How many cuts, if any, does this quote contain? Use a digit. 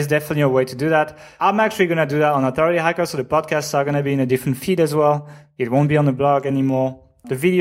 0